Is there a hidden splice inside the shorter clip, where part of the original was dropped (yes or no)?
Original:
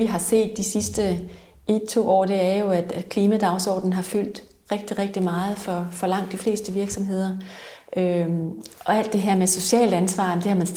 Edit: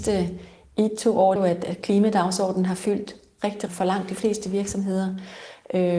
yes